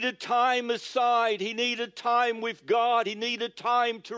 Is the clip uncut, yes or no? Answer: yes